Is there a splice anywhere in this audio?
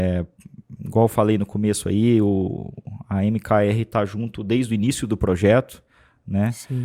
no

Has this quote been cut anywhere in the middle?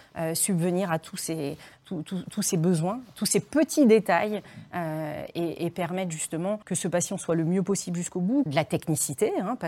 yes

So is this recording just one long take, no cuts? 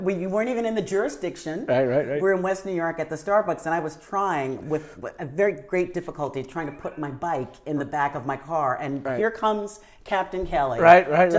yes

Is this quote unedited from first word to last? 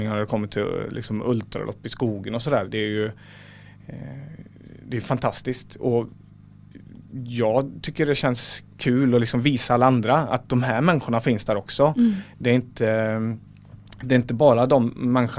yes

